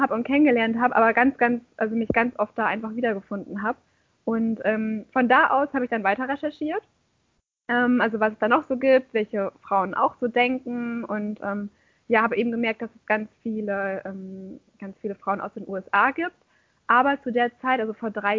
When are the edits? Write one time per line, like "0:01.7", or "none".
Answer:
none